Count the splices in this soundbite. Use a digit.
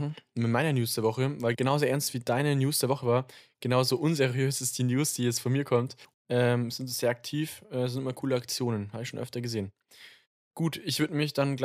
1